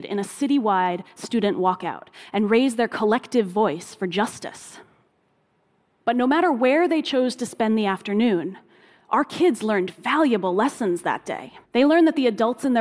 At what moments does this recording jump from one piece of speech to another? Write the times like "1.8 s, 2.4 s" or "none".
11.6 s